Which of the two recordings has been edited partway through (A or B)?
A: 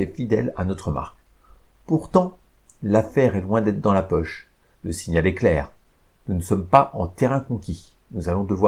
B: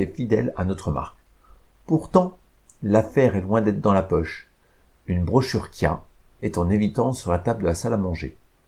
A